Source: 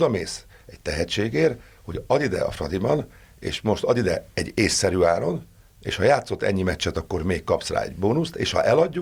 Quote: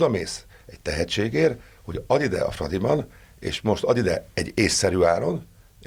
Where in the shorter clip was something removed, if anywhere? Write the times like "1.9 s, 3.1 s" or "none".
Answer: none